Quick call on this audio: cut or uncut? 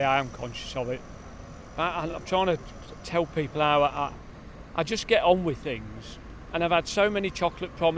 uncut